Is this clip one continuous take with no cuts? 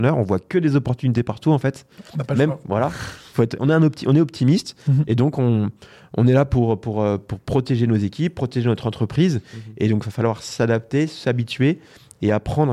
yes; 0 cuts

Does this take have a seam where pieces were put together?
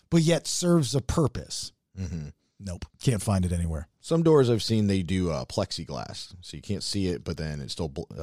yes; 1 cut; at 2.9 s

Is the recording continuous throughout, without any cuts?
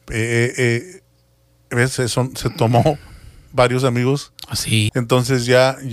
no; 1 cut; at 4.9 s

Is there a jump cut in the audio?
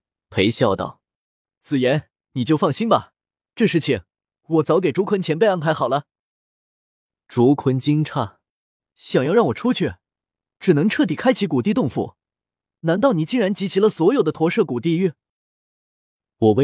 no; 0 cuts

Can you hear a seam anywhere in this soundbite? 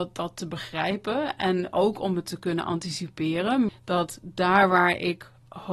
yes; 1 cut; at 3.7 s

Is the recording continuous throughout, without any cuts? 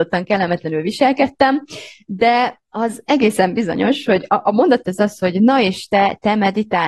no; 1 cut; at 4.8 s

